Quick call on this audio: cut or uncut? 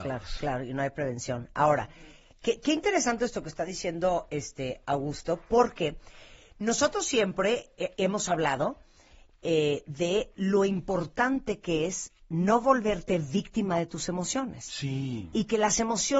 uncut